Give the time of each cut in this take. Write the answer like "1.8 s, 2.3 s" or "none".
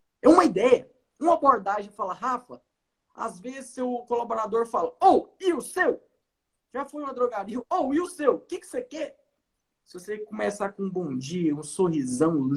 7.6 s